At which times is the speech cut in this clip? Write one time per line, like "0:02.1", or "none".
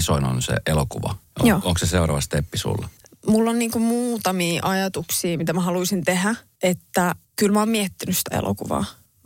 0:03.1